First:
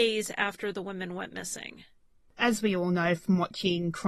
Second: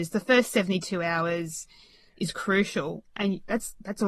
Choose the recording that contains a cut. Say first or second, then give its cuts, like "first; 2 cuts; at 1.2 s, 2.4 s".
first; 1 cut; at 2.3 s